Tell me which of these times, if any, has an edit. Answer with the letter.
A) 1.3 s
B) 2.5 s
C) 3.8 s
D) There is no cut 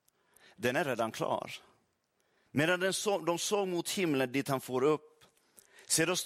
B